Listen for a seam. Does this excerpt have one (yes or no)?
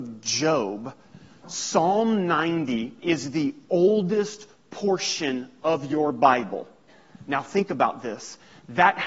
no